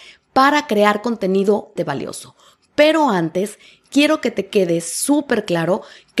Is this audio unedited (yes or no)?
no